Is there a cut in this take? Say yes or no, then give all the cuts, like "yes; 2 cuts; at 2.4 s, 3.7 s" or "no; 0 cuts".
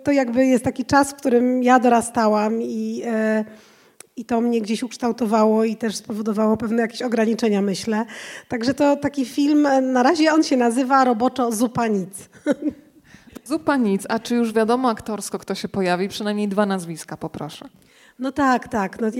no; 0 cuts